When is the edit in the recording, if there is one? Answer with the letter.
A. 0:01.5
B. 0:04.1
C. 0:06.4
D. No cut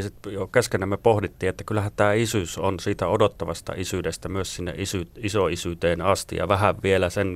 D